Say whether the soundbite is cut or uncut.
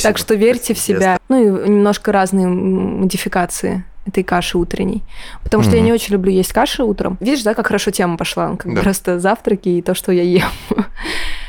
cut